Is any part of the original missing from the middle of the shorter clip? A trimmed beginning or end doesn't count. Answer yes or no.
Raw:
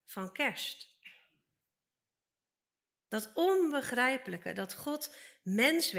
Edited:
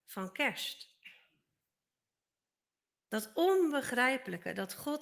no